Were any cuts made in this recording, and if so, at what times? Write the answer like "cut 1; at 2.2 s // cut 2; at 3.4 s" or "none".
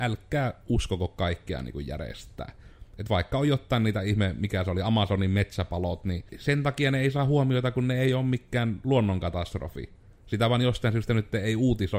cut 1; at 6.3 s